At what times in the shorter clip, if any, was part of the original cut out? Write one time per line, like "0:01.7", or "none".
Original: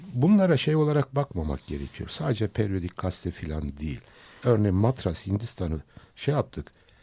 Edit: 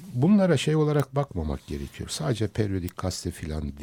none